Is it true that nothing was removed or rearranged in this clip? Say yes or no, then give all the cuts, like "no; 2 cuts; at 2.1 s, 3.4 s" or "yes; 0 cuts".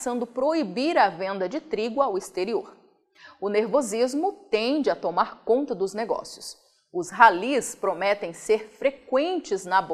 yes; 0 cuts